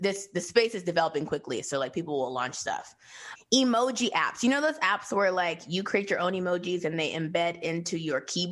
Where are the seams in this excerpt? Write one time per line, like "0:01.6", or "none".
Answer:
0:03.4